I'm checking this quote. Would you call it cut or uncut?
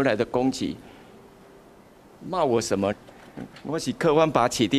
cut